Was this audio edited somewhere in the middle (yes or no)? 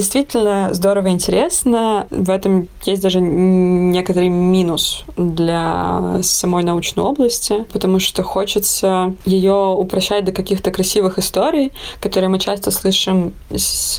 no